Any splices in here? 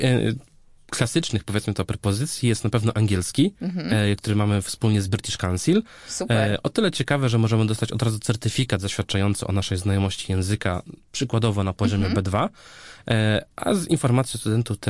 no; 0 cuts

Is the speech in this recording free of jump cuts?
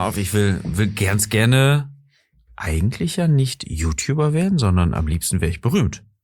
yes; 0 cuts

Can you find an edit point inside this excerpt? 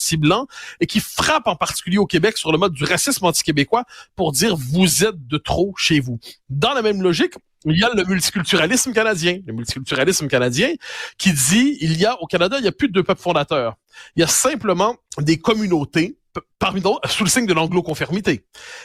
yes; 1 cut; at 15.1 s

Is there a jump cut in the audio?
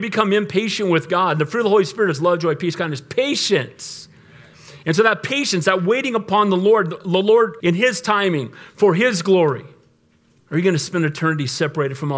yes; 2 cuts; at 7.6 s, 10.4 s

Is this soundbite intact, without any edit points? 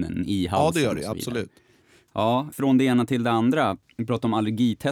yes; 0 cuts

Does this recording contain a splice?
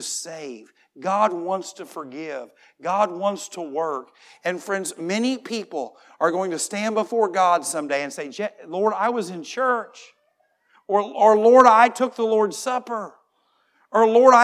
no; 0 cuts

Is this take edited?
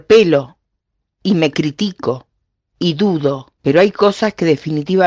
yes; 1 cut; at 3.6 s

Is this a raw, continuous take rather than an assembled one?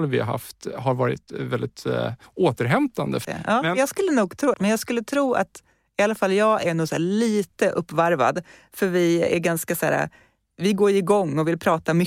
no; 2 cuts; at 3.2 s, 4.5 s

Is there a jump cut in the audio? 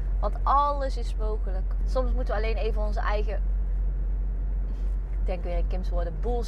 yes; 1 cut; at 1.8 s

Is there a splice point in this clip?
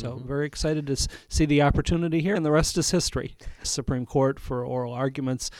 yes; 2 cuts; at 2.4 s, 3.6 s

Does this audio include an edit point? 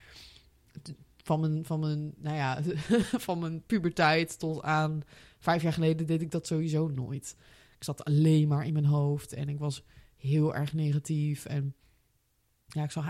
no; 0 cuts

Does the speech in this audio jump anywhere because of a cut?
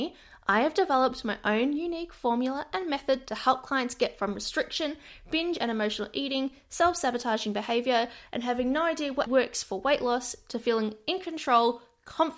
yes; 1 cut; at 9.3 s

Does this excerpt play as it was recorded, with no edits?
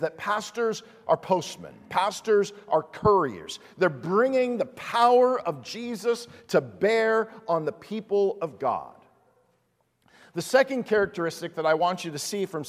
yes; 0 cuts

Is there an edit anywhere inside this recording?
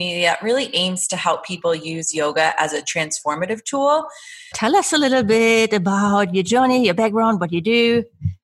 yes; 1 cut; at 4.5 s

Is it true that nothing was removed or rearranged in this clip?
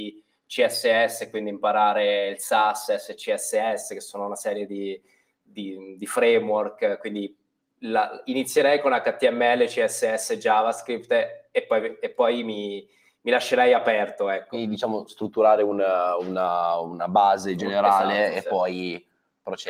yes; 0 cuts

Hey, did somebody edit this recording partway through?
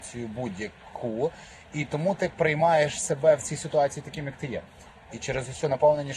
yes; 1 cut; at 4.9 s

